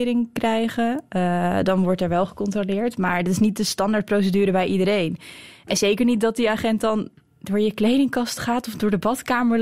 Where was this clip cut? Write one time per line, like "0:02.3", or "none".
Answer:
none